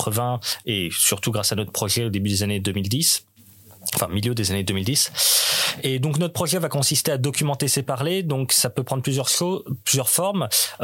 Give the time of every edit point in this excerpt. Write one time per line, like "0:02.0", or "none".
none

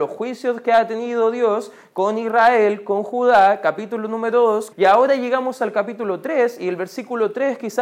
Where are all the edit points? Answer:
0:04.7

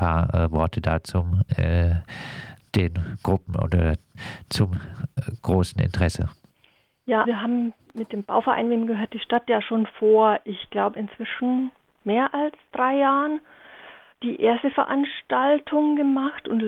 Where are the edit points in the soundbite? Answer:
0:07.2
0:14.1

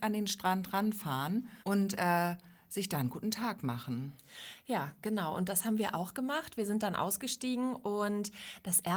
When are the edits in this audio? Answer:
0:01.6

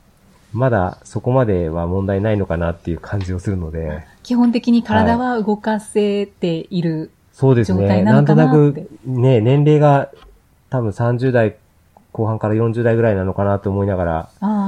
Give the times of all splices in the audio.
none

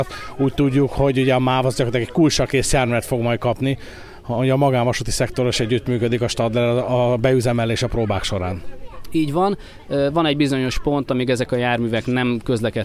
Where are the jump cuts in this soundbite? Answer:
none

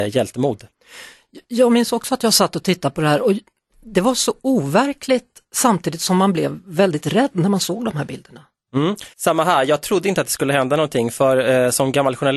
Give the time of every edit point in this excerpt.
0:09.1

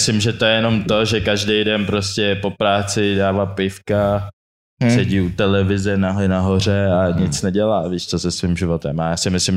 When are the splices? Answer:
none

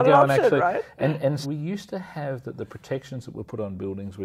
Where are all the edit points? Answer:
0:01.4

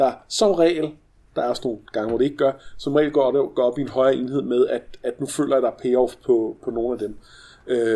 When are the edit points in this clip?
none

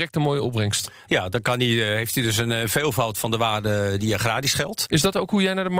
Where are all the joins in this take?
0:04.9

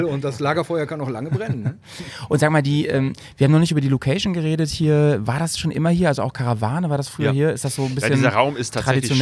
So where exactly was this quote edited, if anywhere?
none

